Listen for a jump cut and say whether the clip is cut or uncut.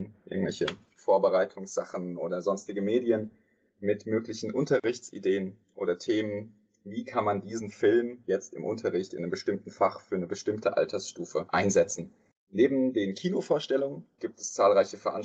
cut